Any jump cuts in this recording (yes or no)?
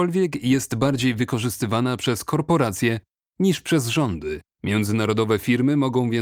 yes